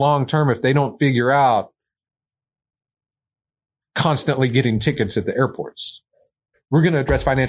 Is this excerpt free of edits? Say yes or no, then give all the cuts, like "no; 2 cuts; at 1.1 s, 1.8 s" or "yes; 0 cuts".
no; 1 cut; at 6.5 s